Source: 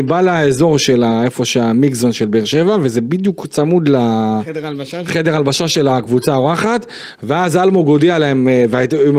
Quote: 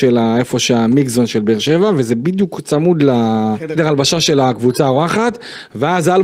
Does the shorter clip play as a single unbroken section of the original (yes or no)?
no